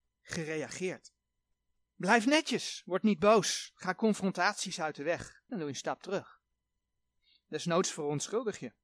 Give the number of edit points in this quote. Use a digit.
1